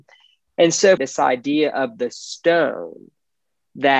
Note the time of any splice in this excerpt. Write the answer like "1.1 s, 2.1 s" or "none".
1.0 s